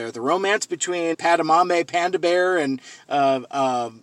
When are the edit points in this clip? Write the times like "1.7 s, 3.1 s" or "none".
1.1 s